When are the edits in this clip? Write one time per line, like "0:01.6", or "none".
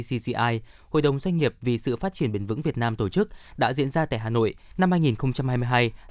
0:04.7